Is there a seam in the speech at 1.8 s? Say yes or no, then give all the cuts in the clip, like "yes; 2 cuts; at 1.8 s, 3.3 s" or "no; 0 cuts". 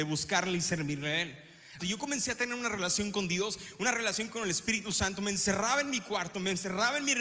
yes; 1 cut; at 1.8 s